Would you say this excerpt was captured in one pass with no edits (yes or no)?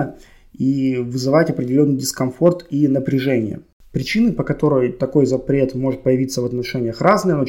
yes